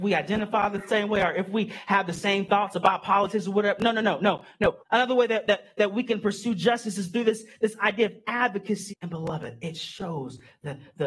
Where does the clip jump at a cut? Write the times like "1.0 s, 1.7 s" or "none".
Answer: 4.8 s, 8.9 s

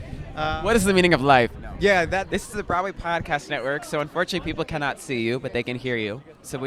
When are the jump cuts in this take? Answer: 2.3 s

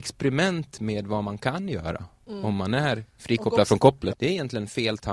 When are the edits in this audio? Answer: 4.1 s

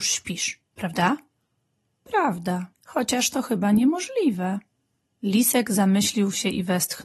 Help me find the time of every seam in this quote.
2.7 s, 5.1 s

